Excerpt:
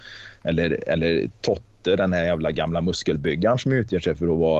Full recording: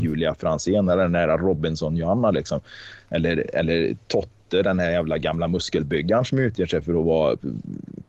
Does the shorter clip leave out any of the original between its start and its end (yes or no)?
no